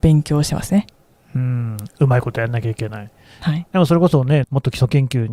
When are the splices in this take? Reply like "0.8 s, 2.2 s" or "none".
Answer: 4.4 s